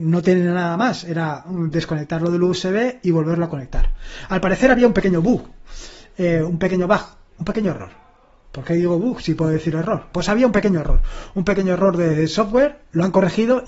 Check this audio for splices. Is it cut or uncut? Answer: cut